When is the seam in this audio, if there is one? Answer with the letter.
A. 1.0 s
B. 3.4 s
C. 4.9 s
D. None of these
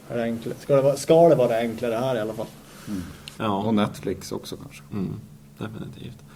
B